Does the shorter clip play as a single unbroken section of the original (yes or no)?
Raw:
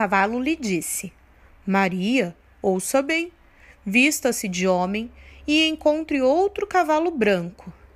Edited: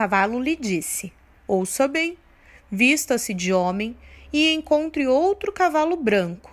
no